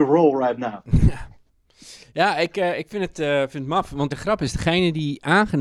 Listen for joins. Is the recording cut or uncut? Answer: cut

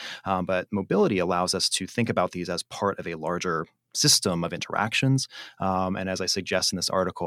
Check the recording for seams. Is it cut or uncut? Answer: uncut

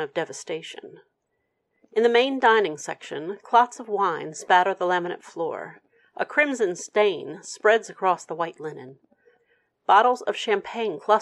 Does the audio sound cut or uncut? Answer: uncut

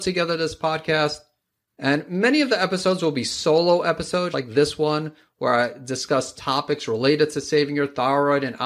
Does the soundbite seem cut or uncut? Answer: cut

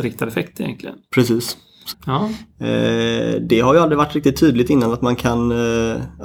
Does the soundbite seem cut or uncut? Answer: cut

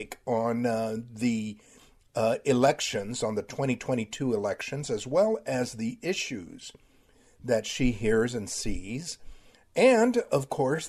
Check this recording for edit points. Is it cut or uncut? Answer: uncut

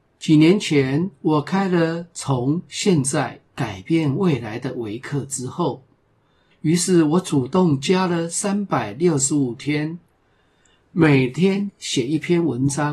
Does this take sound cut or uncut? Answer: cut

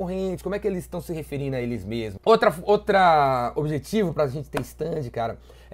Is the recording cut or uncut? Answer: cut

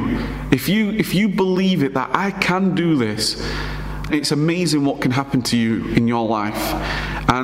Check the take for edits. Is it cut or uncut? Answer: cut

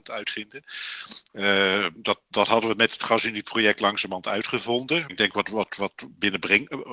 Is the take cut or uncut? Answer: cut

